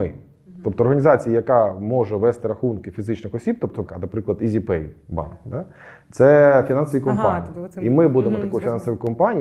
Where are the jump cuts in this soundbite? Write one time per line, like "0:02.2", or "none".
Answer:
0:03.9